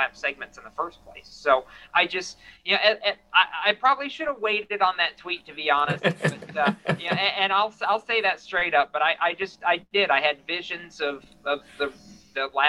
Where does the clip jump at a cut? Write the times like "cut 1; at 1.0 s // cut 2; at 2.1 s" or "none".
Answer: none